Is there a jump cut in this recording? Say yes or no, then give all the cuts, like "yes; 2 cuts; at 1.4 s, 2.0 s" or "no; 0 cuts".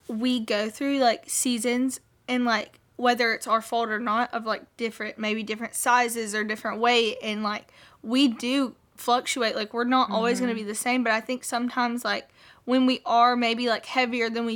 no; 0 cuts